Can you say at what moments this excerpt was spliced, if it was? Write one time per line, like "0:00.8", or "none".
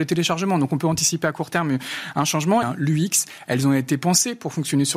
0:02.6

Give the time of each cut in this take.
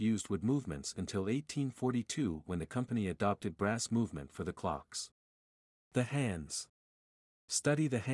none

